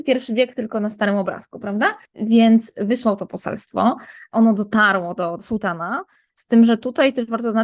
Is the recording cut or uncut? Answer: cut